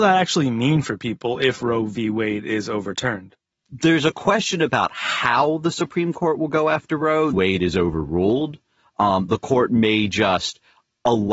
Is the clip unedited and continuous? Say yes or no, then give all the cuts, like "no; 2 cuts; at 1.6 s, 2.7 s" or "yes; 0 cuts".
no; 1 cut; at 7.3 s